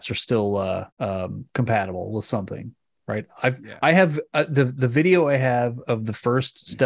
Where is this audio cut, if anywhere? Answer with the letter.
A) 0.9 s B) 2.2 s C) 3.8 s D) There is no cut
A